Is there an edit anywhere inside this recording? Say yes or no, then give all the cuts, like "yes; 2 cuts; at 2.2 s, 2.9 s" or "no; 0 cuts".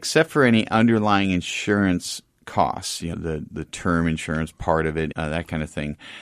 yes; 2 cuts; at 3.1 s, 5.1 s